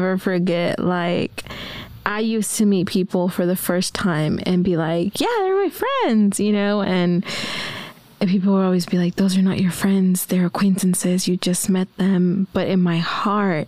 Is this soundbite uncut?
yes; 0 cuts

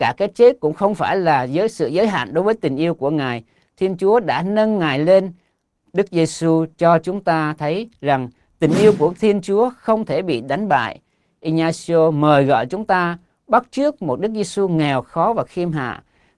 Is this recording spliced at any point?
no; 0 cuts

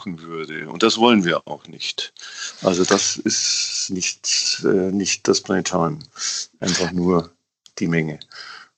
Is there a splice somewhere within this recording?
no; 0 cuts

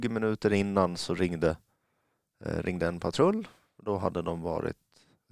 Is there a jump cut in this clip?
no; 0 cuts

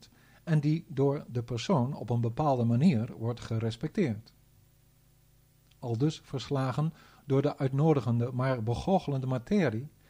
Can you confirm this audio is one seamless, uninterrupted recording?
yes; 0 cuts

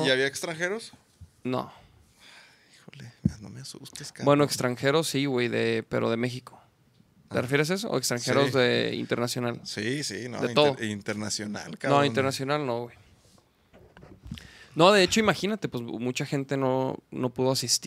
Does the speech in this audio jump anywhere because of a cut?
no; 0 cuts

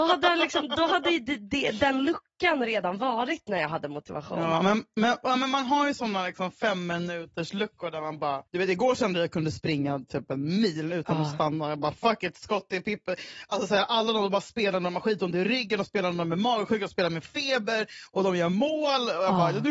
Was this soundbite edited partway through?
yes; 1 cut; at 8.5 s

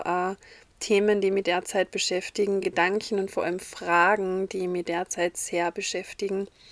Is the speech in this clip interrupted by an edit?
no; 0 cuts

